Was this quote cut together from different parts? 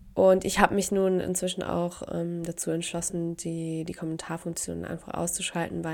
no; 0 cuts

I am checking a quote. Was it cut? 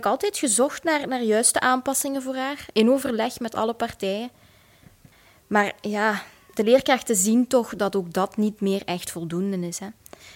no; 0 cuts

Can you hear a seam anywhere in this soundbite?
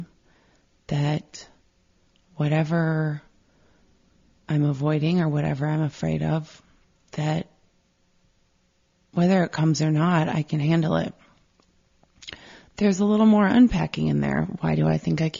no; 0 cuts

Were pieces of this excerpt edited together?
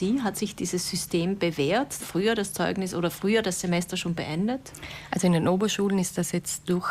yes; 1 cut; at 2.0 s

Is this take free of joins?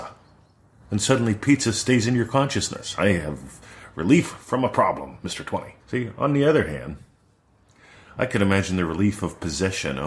no; 1 cut; at 5.8 s

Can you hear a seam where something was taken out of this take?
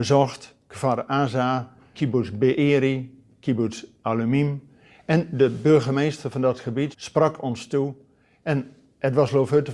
yes; 2 cuts; at 1.9 s, 6.9 s

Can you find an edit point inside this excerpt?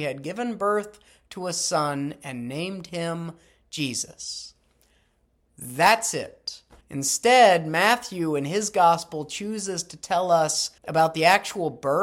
yes; 2 cuts; at 6.8 s, 10.8 s

